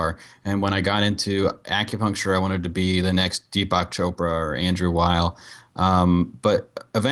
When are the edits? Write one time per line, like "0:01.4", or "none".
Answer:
none

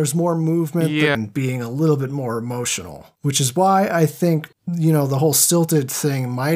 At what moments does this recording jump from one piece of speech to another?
0:01.1

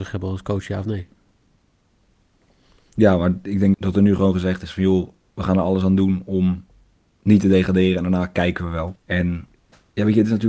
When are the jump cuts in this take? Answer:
0:03.7
0:09.0

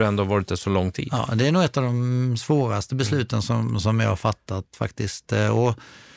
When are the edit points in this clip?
none

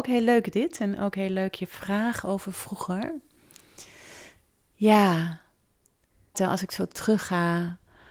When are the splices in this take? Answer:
0:06.3

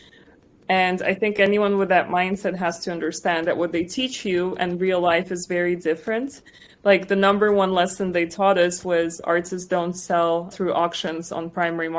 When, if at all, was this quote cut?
none

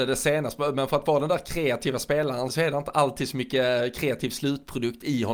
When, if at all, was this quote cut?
0:02.5

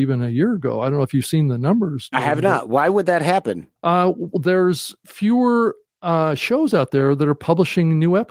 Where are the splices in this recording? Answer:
0:03.8

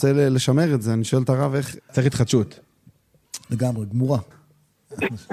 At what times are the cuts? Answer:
0:01.8
0:04.3

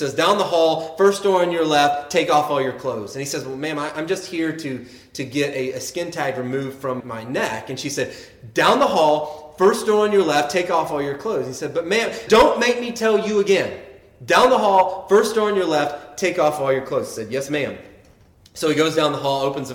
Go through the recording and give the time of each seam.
0:07.0
0:12.3

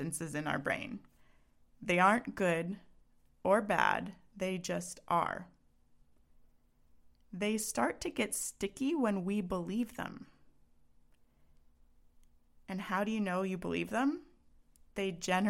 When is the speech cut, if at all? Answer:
none

